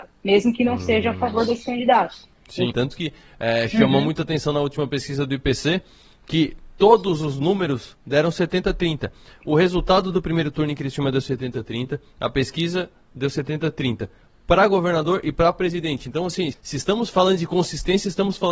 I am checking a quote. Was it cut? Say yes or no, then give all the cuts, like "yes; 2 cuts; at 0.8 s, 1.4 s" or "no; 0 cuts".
yes; 2 cuts; at 2.7 s, 16.5 s